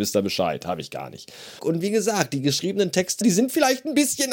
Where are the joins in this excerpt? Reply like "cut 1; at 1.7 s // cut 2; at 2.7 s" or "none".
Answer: cut 1; at 1.6 s // cut 2; at 3.2 s